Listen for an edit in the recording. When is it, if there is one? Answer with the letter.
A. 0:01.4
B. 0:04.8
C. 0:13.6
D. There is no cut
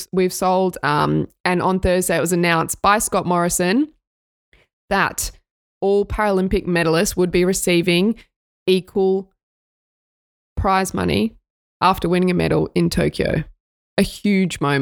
D